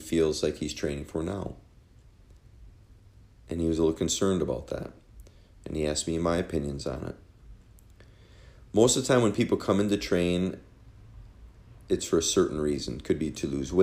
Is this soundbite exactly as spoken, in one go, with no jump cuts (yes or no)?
yes